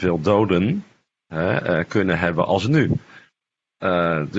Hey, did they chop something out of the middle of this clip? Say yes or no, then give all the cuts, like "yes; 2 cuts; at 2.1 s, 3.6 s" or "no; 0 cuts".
no; 0 cuts